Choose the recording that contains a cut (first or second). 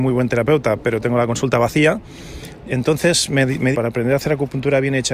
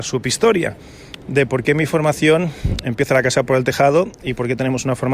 first